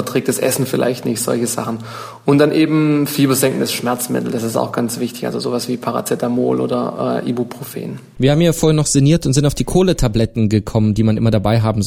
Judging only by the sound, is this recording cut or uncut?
uncut